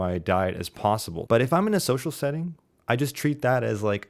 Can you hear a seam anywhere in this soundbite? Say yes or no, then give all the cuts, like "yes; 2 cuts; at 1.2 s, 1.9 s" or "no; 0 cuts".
yes; 1 cut; at 1.3 s